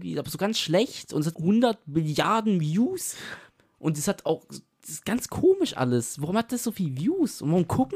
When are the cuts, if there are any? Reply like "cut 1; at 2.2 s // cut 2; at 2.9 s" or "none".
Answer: cut 1; at 1.3 s